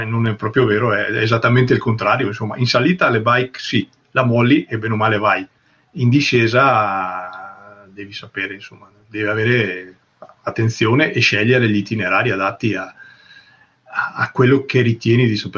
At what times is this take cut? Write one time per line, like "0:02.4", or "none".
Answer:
none

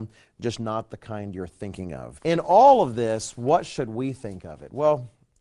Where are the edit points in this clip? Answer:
0:02.2

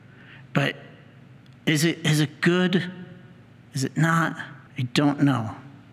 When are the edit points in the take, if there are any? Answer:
0:04.7

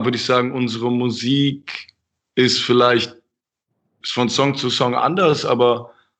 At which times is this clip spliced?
none

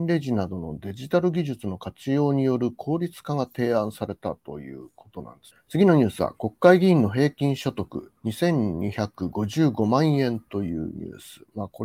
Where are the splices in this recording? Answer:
0:05.5
0:08.2

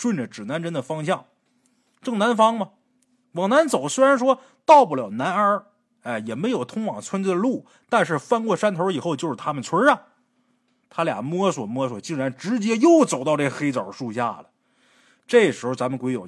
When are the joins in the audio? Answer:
0:03.2
0:10.8

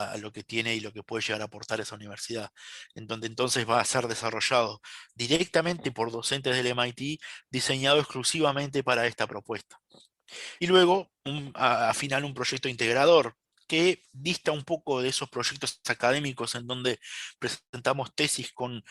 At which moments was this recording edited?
none

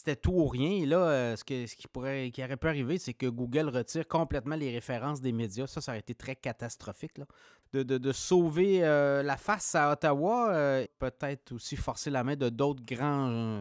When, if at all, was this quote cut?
0:07.6
0:10.9

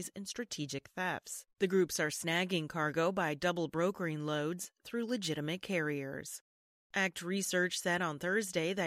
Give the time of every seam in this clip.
none

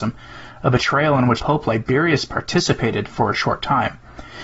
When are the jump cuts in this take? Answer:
0:01.4

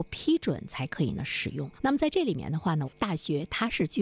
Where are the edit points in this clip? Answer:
0:01.7
0:02.8

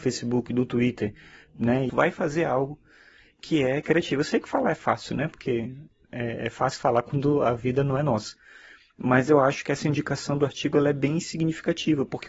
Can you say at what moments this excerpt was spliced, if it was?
0:01.9

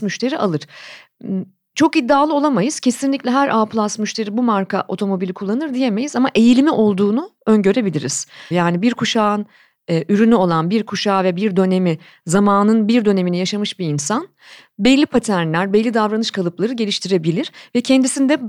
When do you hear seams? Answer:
0:08.5

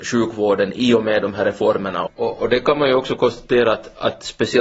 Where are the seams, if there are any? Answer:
0:02.1

